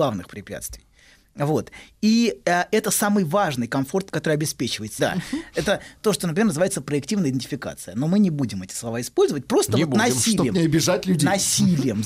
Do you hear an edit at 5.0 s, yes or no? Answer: yes